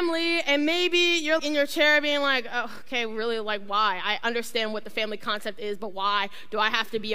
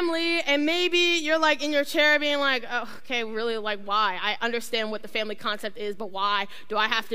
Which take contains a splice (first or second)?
first